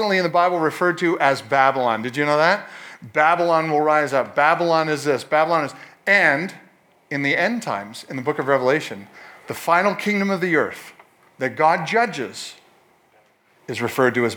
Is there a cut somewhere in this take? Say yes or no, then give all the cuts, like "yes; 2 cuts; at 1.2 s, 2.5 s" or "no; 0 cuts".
no; 0 cuts